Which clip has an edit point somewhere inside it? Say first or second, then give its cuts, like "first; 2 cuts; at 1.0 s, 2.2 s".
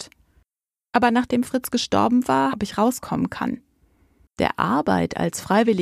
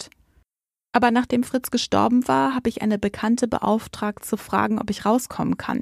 first; 2 cuts; at 2.5 s, 4.3 s